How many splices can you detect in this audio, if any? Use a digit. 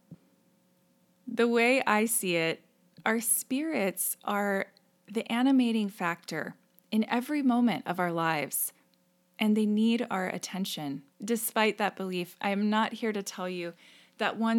1